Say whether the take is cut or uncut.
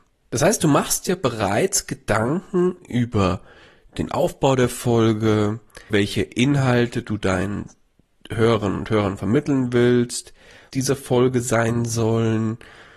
cut